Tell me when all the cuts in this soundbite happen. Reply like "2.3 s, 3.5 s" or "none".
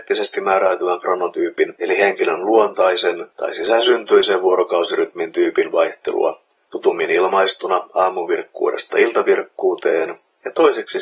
none